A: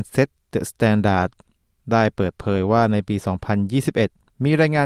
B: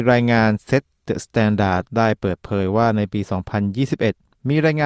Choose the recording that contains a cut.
B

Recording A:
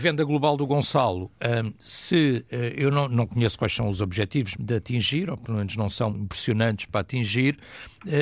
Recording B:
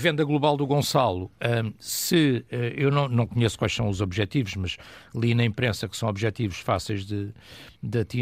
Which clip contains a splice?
A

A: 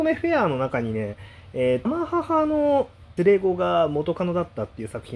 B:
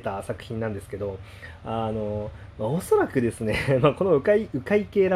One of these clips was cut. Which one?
A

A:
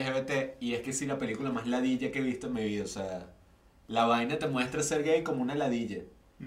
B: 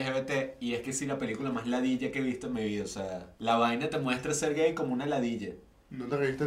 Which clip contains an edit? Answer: B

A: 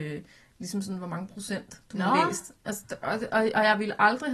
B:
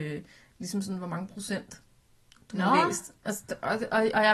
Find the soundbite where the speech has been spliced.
A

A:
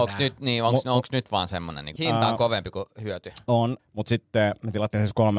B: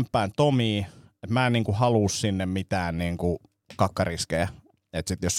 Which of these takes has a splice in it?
A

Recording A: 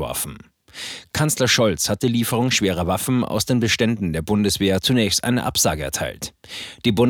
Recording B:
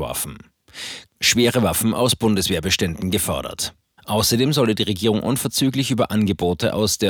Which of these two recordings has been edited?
B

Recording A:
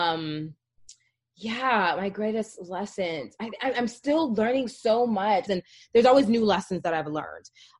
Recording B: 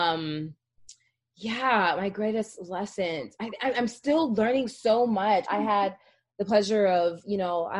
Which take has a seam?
A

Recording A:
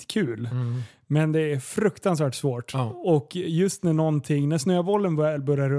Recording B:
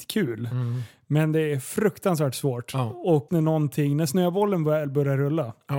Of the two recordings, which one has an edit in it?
B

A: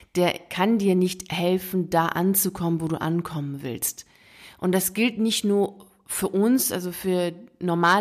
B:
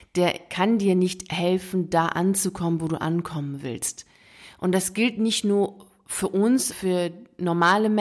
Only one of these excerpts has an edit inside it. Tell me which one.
B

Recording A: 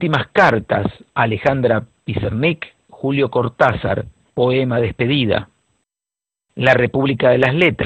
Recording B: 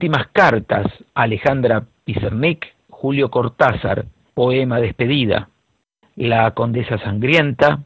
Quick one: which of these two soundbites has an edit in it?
B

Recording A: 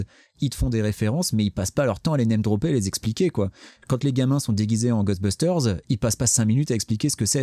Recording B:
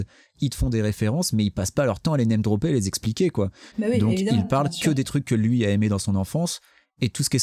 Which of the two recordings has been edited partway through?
B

